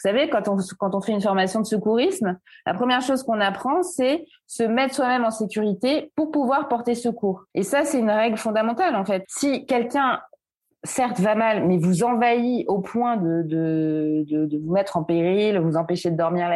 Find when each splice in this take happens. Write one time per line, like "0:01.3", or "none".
0:07.5
0:09.2